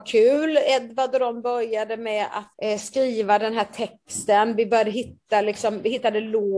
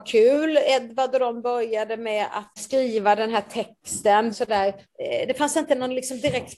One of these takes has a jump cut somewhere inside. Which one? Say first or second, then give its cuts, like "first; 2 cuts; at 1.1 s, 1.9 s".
second; 2 cuts; at 2.6 s, 4.3 s